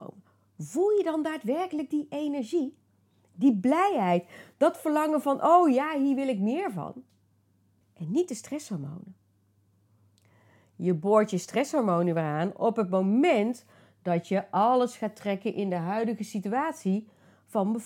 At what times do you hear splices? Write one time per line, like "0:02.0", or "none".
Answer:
0:07.8